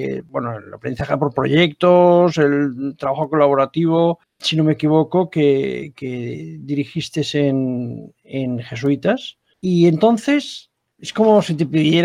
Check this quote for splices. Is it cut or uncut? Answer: uncut